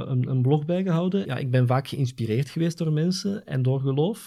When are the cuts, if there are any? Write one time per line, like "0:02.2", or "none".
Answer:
0:01.2